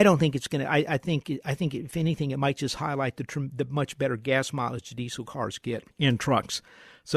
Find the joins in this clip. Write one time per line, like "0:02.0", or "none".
0:05.9